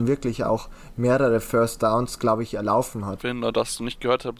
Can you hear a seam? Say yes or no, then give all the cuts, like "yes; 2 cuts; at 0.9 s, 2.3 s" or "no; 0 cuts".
yes; 1 cut; at 3.2 s